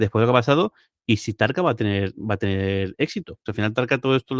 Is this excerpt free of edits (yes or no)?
no